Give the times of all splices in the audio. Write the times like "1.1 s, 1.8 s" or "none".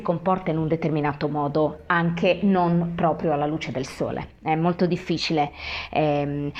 none